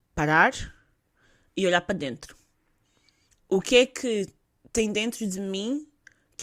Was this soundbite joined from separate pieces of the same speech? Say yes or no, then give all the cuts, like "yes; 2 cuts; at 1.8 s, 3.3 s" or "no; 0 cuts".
no; 0 cuts